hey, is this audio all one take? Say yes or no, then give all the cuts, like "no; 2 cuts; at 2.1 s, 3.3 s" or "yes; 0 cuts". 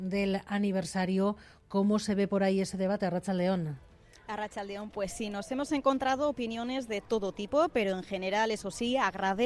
yes; 0 cuts